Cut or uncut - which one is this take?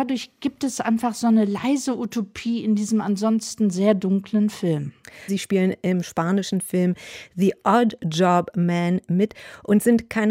cut